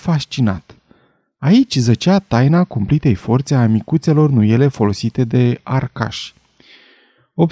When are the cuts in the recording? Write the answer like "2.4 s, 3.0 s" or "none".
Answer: none